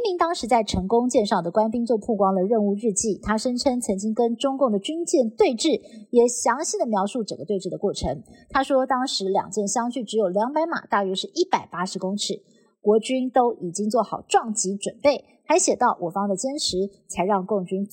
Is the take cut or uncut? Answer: uncut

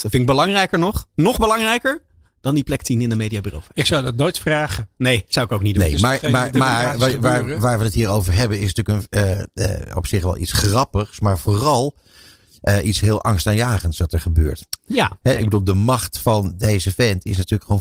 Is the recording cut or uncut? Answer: uncut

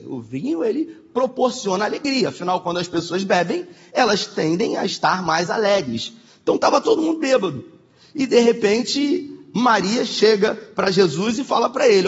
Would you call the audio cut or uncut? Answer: uncut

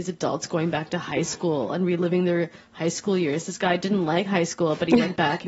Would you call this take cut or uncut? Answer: uncut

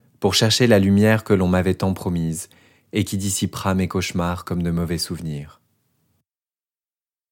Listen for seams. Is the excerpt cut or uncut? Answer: uncut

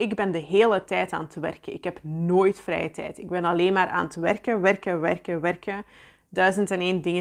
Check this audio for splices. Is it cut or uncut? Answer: uncut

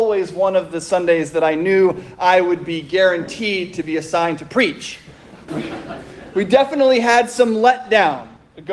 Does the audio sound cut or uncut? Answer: cut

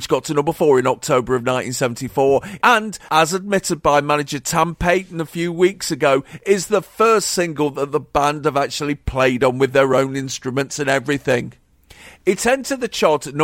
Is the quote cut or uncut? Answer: cut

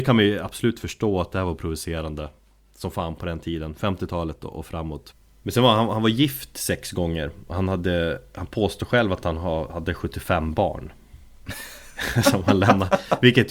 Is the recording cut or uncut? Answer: uncut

